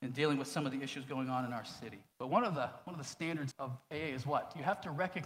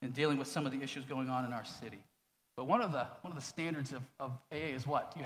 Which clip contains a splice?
first; 2 cuts; at 2.1 s, 3.5 s

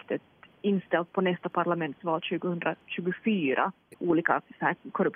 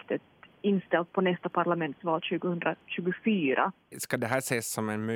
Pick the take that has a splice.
first; 1 cut; at 3.9 s

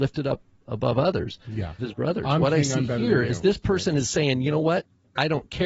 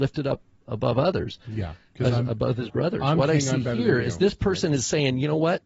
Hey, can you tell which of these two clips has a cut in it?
first; 1 cut; at 1.8 s

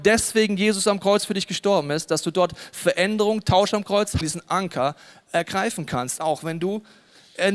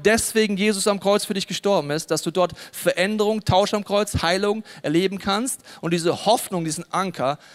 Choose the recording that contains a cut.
first; 1 cut; at 4.2 s

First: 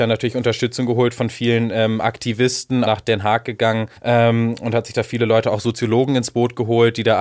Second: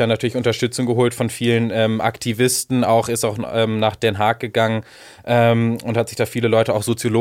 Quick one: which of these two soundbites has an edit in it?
first; 2 cuts; at 2.9 s, 4.0 s

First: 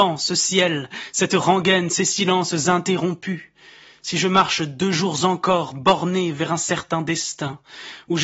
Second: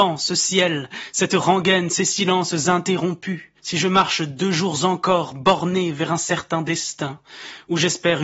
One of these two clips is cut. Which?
second; 1 cut; at 3.6 s

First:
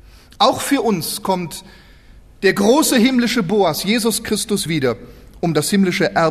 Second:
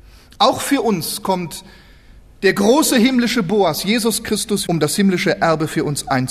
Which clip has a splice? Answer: second; 1 cut; at 4.7 s

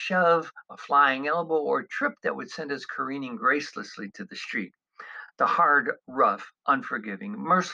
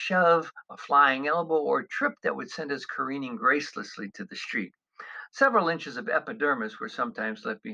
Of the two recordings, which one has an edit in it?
second; 1 cut; at 5.3 s

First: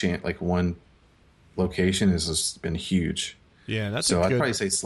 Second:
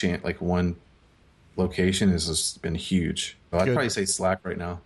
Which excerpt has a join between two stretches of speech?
second; 1 cut; at 3.5 s

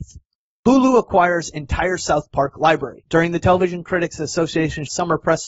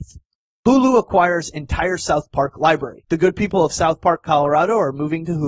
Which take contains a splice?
first; 1 cut; at 3.0 s

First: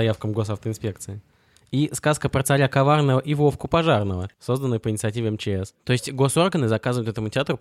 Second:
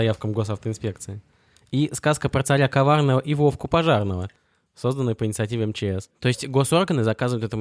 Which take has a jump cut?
first; 1 cut; at 4.3 s

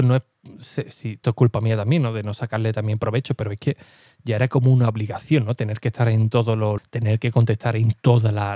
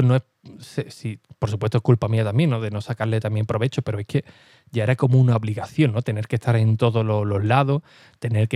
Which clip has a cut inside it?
first; 2 cuts; at 1.2 s, 6.8 s

